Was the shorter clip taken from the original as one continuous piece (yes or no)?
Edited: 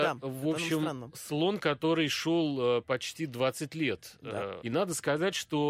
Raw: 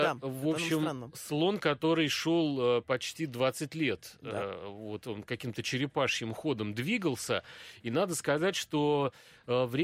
no